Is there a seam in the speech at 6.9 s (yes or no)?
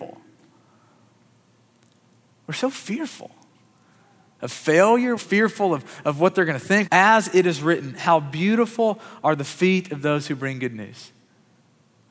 yes